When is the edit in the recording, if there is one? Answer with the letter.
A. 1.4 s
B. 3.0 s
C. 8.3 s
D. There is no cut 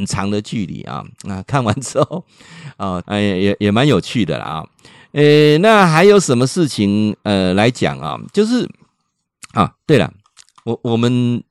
B